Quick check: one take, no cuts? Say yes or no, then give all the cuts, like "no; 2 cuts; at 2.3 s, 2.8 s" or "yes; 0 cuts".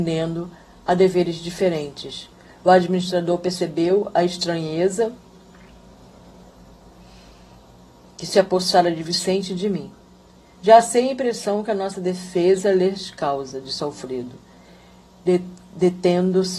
yes; 0 cuts